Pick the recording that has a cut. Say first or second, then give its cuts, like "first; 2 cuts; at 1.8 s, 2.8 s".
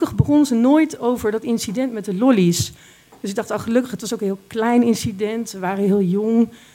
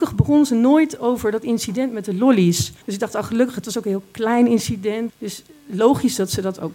second; 2 cuts; at 2.8 s, 5.1 s